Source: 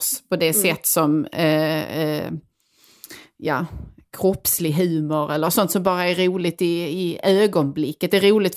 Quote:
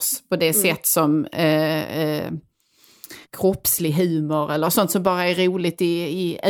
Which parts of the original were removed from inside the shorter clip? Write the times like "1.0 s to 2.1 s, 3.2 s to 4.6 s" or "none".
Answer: 3.2 s to 4.0 s

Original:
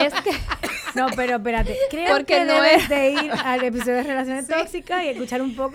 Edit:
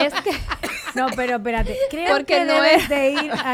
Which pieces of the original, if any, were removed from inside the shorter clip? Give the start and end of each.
none

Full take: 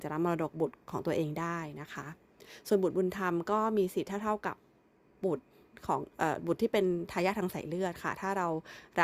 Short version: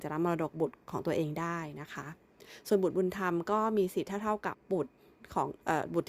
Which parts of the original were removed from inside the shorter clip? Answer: 4.5 s to 5.1 s

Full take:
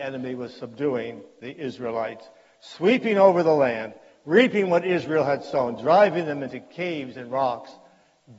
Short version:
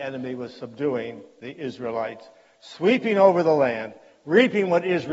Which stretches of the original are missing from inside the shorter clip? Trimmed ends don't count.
none

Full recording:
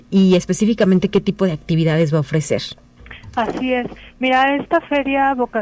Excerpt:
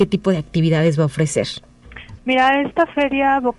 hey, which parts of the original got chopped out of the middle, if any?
3.3 s to 4.1 s

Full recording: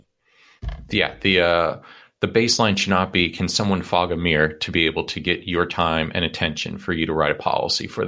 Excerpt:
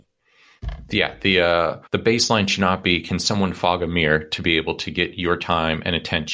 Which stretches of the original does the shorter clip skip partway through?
1.9 s to 2.1 s

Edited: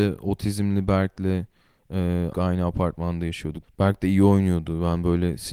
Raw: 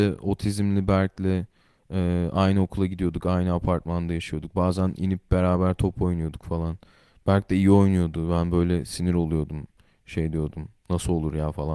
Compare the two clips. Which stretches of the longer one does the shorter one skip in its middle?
2.3 s to 3.2 s, 4.5 s to 7.1 s

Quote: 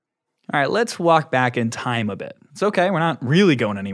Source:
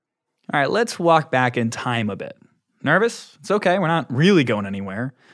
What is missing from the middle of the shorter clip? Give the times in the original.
2.5 s to 3.4 s

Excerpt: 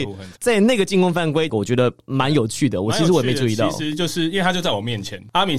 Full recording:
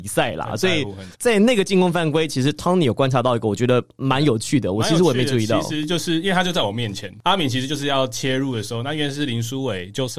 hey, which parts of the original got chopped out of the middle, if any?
2.3 s to 3.4 s

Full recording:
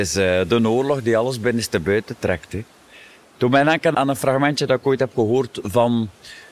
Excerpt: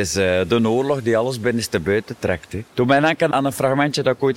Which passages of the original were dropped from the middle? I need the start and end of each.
2.7 s to 3.3 s

